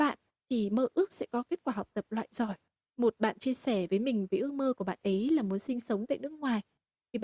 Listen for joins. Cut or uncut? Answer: cut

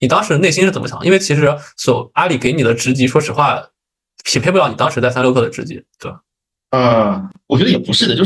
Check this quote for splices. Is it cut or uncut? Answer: uncut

